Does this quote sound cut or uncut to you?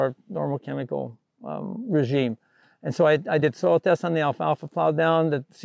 uncut